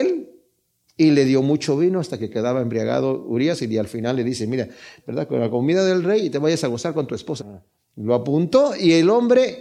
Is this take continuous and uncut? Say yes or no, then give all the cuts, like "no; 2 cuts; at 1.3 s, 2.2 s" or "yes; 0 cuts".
no; 2 cuts; at 5.0 s, 7.4 s